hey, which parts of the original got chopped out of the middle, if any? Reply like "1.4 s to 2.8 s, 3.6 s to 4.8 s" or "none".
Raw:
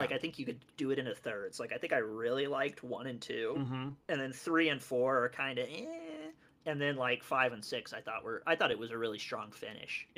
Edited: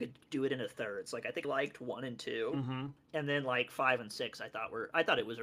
1.9 s to 2.5 s, 4.0 s to 6.5 s